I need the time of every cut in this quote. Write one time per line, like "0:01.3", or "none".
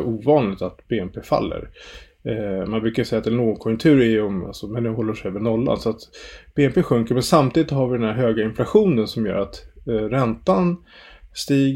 0:04.4